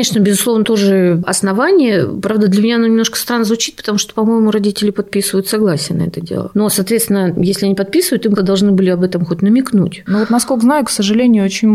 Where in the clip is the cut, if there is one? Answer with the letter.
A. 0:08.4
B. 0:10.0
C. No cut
A